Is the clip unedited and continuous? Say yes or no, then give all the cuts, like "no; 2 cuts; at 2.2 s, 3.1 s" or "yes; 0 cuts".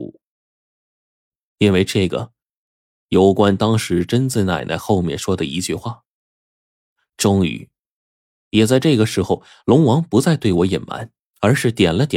no; 1 cut; at 1.5 s